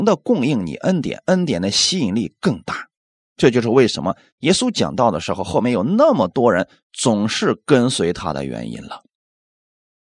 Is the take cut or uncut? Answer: uncut